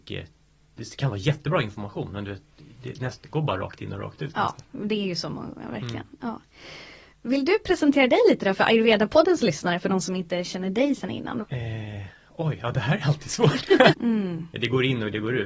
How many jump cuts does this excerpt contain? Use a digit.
2